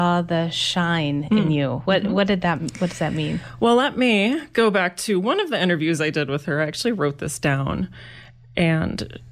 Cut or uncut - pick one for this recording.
uncut